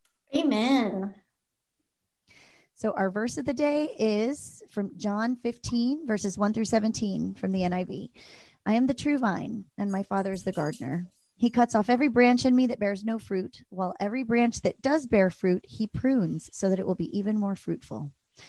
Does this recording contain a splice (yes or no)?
no